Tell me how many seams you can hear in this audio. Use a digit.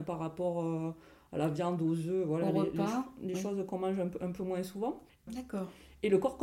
1